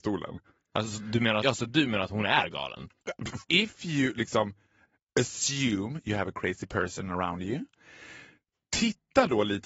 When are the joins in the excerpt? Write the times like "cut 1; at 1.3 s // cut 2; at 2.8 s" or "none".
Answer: cut 1; at 1.4 s // cut 2; at 3.4 s